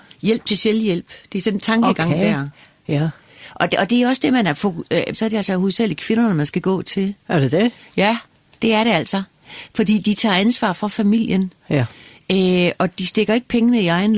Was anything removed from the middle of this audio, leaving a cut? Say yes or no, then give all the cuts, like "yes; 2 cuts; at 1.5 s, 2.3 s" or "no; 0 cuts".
yes; 1 cut; at 5.1 s